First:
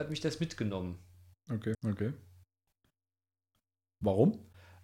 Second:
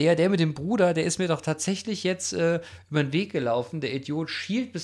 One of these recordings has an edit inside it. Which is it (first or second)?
first